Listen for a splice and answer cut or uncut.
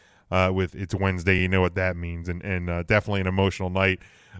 uncut